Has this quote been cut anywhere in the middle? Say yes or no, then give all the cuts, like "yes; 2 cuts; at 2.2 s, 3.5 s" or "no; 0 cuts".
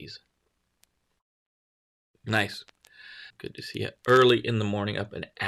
yes; 1 cut; at 3.3 s